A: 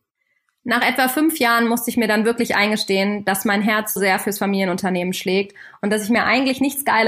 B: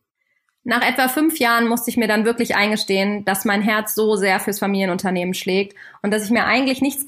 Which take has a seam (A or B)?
A